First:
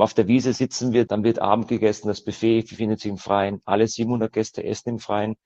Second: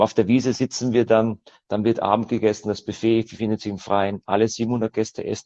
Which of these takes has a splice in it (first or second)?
first